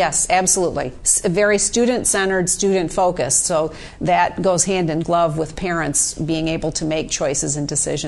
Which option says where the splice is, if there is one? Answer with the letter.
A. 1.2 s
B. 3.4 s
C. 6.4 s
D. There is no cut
D